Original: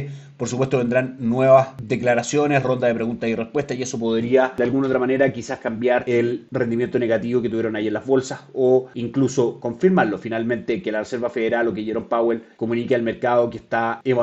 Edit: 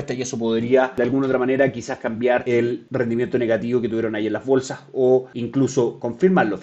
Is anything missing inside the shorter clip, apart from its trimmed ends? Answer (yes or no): no